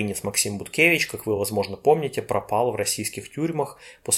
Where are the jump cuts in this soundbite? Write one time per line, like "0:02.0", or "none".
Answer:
none